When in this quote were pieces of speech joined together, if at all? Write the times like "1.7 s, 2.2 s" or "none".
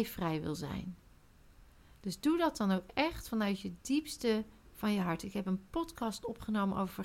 none